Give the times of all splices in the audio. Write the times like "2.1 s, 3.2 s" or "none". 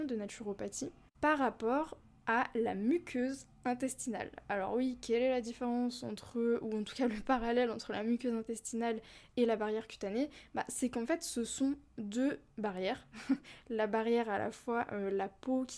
none